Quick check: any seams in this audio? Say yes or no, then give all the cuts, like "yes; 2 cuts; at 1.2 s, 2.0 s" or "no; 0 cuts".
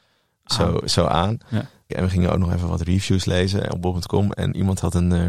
yes; 1 cut; at 1.9 s